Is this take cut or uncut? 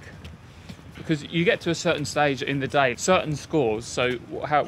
cut